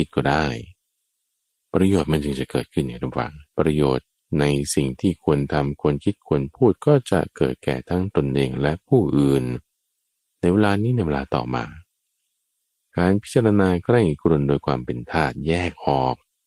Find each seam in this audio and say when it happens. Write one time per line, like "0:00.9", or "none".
0:03.5